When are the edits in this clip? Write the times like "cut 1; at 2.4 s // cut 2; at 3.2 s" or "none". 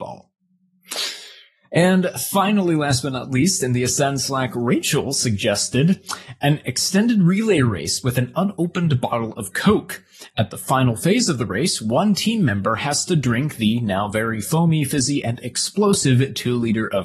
none